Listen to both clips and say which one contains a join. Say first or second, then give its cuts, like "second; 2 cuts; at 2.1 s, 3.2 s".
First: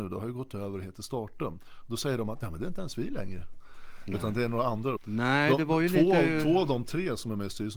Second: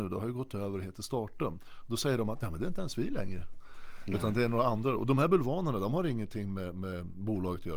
first; 1 cut; at 5.0 s